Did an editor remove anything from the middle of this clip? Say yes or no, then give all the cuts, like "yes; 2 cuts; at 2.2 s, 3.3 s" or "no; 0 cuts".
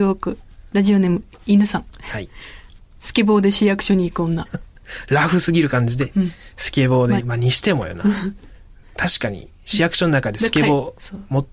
yes; 2 cuts; at 4.5 s, 7.2 s